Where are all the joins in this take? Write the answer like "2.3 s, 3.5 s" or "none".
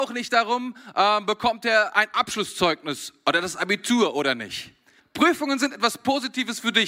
5.0 s

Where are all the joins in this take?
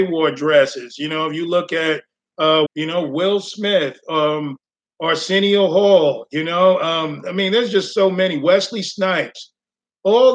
2.7 s

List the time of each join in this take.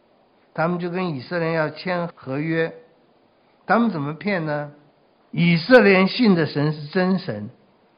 2.1 s, 5.3 s

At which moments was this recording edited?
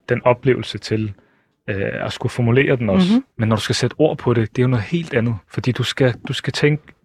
3.3 s, 5.4 s

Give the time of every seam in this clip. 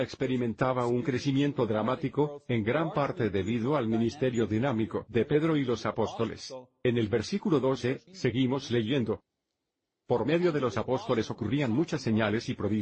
8.1 s

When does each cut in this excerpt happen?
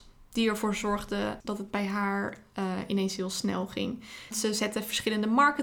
1.4 s, 4.3 s

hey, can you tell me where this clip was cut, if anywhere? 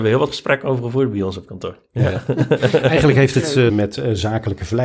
3.7 s

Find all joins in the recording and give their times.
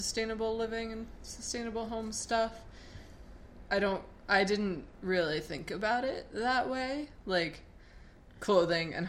none

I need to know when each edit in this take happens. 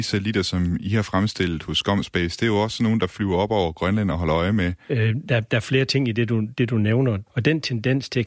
4.9 s, 7.3 s

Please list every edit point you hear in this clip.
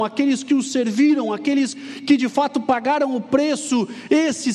1.7 s

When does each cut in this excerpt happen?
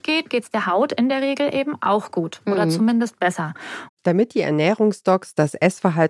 3.9 s

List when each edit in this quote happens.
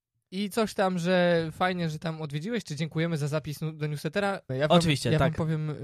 4.5 s

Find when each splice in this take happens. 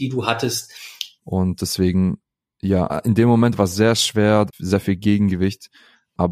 1.2 s, 2.9 s, 4.5 s

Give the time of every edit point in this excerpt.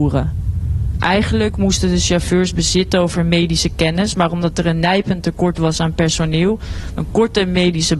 6.9 s

